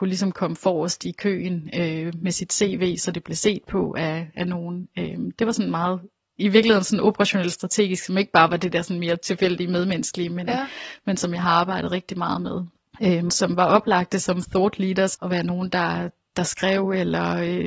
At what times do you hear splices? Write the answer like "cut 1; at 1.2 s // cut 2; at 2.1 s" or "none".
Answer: cut 1; at 13.3 s // cut 2; at 15.1 s